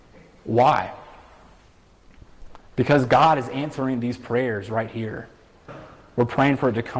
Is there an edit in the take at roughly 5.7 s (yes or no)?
yes